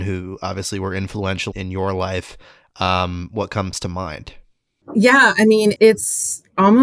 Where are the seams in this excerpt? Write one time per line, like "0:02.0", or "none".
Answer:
0:01.5
0:05.8